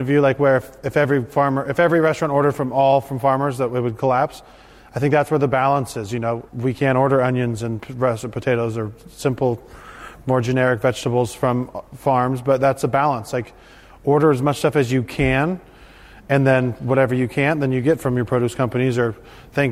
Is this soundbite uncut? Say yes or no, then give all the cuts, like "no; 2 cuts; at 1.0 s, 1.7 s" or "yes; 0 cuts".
no; 1 cut; at 6.5 s